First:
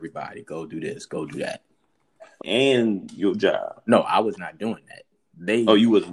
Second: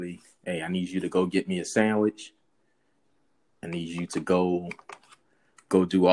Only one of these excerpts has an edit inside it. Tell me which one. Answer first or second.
first